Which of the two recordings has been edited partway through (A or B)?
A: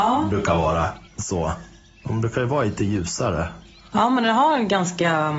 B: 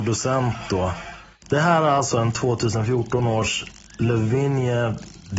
A